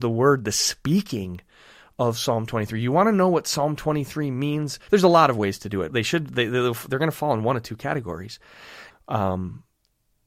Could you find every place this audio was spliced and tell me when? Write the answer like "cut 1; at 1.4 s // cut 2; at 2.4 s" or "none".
cut 1; at 4.9 s // cut 2; at 5.9 s // cut 3; at 8.9 s